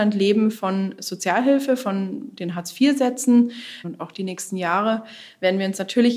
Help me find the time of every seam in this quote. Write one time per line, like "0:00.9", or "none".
0:03.8